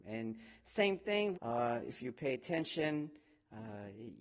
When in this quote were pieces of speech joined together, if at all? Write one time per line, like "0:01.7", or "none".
0:01.3